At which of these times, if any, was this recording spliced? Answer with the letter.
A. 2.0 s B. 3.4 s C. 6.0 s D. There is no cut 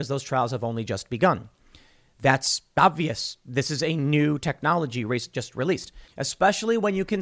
C